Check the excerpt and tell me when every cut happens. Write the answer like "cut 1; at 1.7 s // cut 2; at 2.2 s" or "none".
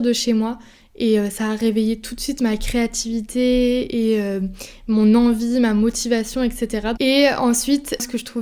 cut 1; at 7.0 s